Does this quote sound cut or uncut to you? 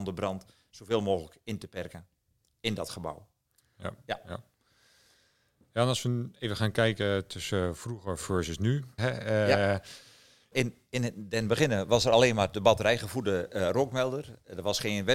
cut